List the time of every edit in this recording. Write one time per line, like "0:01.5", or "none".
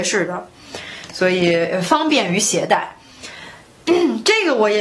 none